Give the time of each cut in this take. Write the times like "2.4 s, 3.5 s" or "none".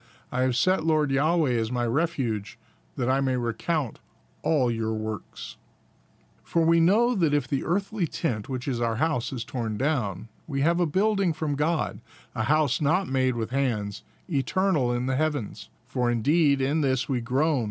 6.4 s, 15.8 s

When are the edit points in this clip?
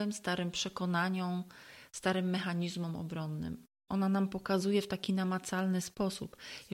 3.9 s

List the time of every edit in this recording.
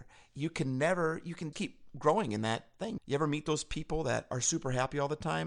1.5 s, 3.0 s

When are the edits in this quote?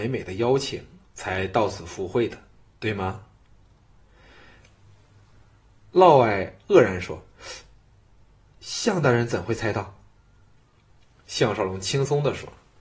none

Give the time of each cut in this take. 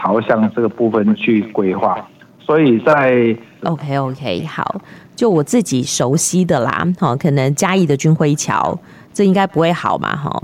3.6 s

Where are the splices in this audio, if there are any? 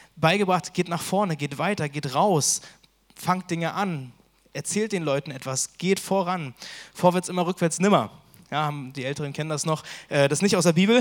none

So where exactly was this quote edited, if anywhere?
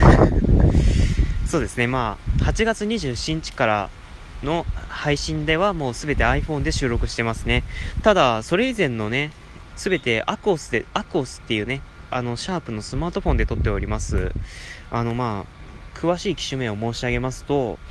9.7 s

